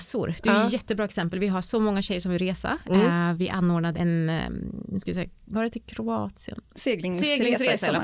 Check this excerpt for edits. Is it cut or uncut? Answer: cut